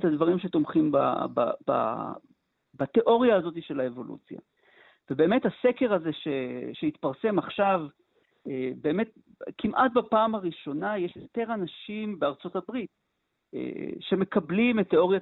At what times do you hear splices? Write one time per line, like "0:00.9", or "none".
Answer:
none